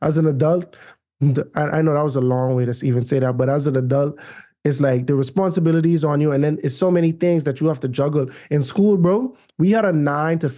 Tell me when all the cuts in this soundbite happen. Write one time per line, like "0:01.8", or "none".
none